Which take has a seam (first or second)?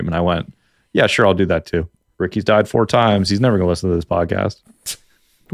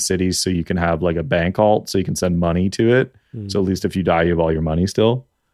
first